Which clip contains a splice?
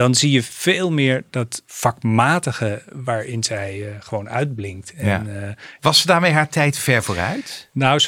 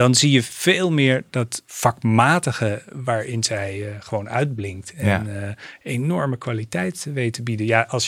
first; 1 cut; at 5.8 s

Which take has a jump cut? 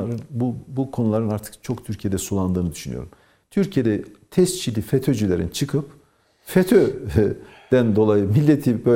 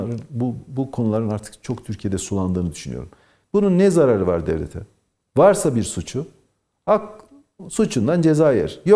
second; 1 cut; at 3.4 s

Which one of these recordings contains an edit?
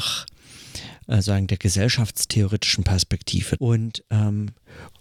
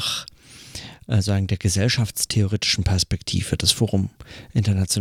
first; 1 cut; at 3.6 s

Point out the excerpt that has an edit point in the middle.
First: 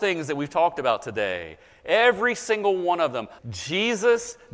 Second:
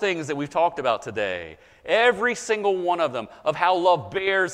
first; 1 cut; at 3.4 s

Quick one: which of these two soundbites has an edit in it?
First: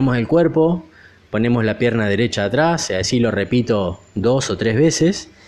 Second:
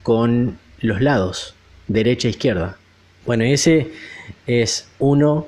second; 1 cut; at 3.2 s

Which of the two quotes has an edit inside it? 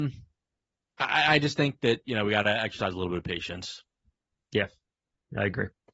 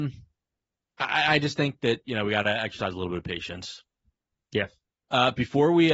second; 1 cut; at 5.0 s

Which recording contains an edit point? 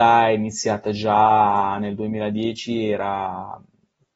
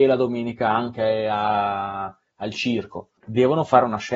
second; 1 cut; at 3.2 s

